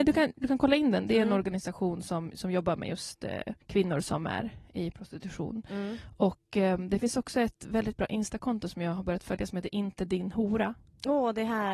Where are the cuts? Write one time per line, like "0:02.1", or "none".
0:03.6